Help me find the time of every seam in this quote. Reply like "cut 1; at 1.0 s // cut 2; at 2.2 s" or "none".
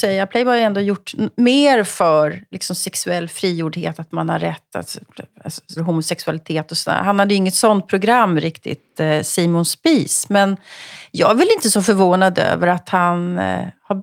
cut 1; at 5.8 s